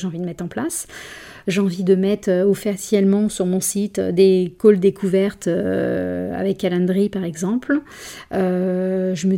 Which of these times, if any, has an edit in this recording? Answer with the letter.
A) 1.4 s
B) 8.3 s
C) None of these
A